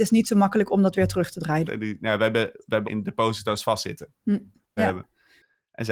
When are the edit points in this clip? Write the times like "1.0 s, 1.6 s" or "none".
1.7 s, 2.8 s, 4.8 s